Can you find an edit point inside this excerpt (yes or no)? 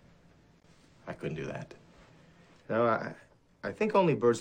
no